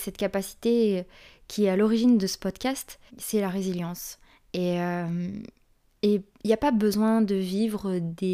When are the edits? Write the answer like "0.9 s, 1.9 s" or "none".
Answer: 3.1 s